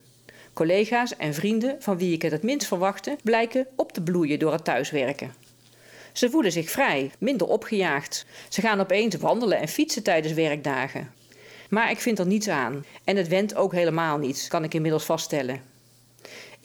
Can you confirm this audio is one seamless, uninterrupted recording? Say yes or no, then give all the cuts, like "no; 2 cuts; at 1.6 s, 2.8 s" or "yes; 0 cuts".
no; 2 cuts; at 7.1 s, 11.7 s